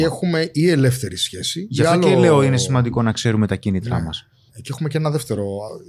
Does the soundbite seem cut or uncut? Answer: uncut